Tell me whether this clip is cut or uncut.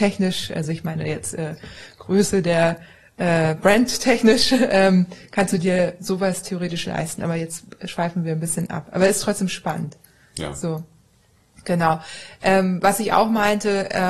uncut